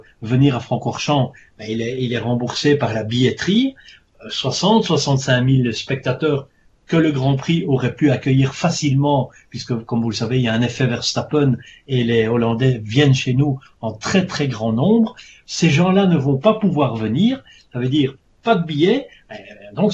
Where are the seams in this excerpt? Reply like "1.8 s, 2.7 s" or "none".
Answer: none